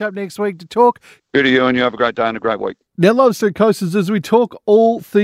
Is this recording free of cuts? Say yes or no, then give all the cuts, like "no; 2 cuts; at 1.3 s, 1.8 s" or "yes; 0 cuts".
no; 1 cut; at 1.2 s